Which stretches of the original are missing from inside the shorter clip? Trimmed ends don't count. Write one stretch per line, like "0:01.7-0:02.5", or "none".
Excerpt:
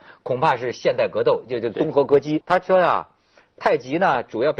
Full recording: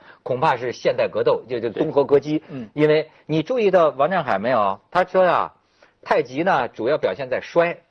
0:02.4-0:04.9